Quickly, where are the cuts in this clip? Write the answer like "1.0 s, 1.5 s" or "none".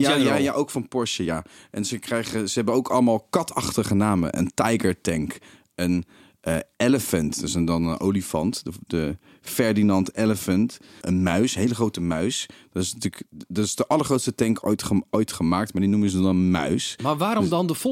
11.0 s